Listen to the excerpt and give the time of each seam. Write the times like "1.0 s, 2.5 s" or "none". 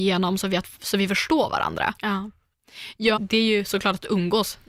2.0 s, 3.2 s